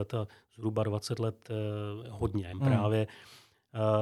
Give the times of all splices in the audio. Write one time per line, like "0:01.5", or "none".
0:02.5